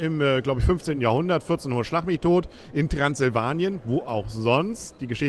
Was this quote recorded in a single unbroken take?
yes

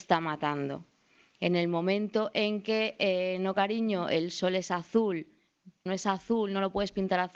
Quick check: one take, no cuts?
no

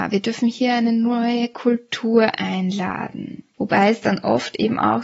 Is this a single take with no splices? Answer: no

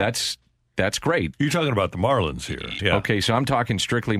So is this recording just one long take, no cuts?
no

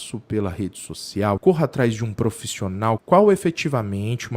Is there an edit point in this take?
yes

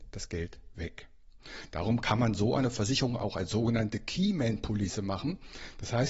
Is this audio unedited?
yes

